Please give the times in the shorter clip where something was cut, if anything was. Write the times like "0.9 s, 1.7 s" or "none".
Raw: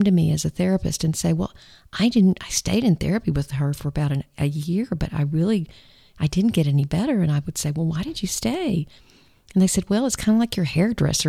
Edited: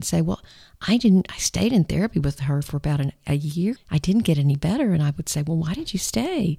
3.8 s